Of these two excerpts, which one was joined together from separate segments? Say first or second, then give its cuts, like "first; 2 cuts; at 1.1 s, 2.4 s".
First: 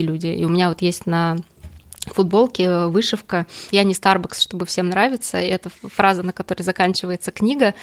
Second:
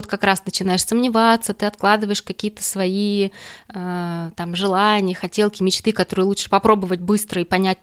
first; 1 cut; at 3.7 s